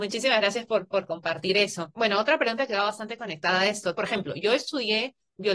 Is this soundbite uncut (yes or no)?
no